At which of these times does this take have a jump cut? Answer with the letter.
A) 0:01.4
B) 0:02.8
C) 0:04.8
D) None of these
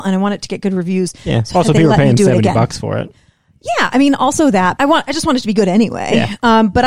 C